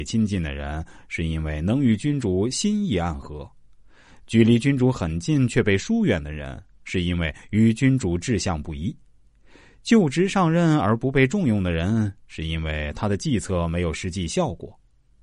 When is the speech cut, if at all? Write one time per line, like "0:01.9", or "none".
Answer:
none